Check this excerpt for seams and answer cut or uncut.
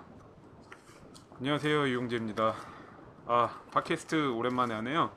uncut